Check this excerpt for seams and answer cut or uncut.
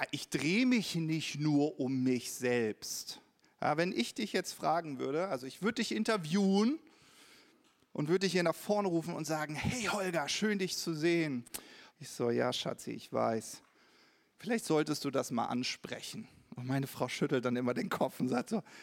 cut